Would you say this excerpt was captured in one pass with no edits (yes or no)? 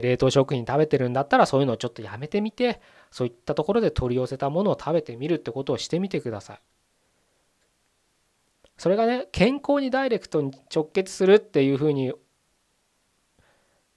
yes